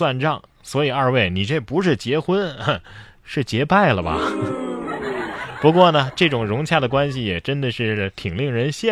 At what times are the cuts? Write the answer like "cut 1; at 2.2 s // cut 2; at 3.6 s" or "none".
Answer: none